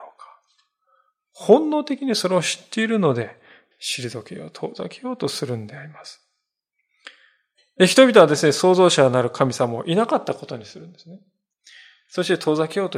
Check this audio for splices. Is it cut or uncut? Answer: cut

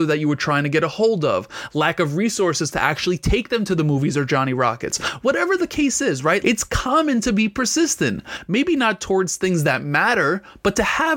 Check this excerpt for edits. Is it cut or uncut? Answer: cut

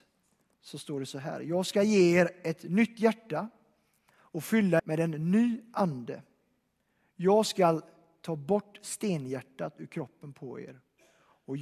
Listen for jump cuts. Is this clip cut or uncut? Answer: cut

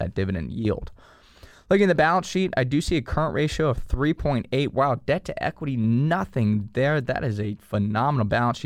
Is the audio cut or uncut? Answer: uncut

